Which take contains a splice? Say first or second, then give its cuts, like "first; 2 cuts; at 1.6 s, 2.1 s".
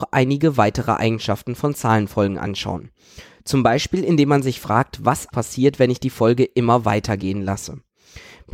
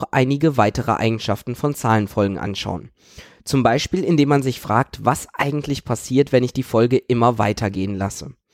first; 1 cut; at 5.3 s